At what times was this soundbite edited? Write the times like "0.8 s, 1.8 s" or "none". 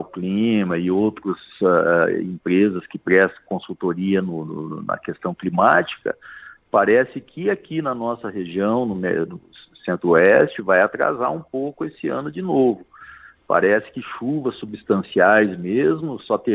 none